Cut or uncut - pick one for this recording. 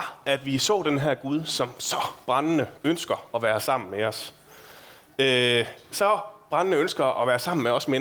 uncut